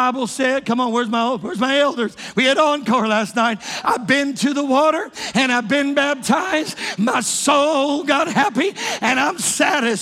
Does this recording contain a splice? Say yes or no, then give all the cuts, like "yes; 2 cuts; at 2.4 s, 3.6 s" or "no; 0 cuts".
no; 0 cuts